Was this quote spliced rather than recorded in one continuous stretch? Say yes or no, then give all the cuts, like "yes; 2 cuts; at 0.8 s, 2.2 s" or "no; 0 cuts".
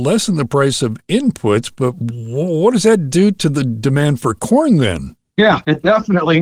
no; 0 cuts